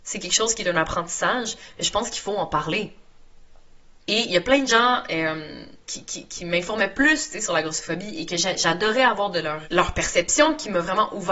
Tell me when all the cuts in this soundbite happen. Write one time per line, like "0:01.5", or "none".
0:04.0
0:05.8
0:09.6